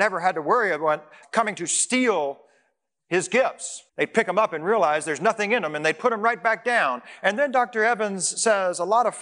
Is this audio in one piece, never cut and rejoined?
no; 2 cuts; at 1.2 s, 3.9 s

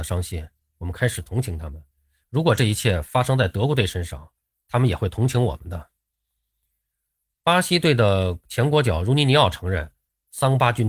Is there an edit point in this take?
no; 0 cuts

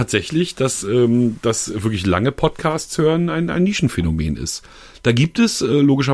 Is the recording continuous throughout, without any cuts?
yes; 0 cuts

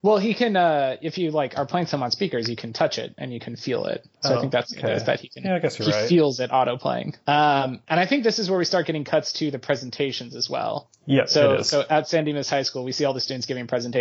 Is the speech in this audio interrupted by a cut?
no; 0 cuts

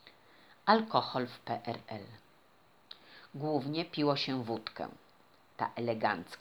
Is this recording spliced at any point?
no; 0 cuts

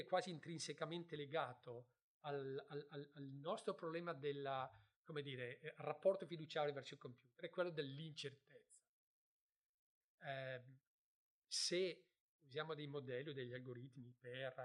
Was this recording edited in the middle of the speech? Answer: yes; 1 cut; at 10.0 s

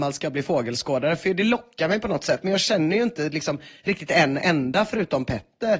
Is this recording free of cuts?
yes; 0 cuts

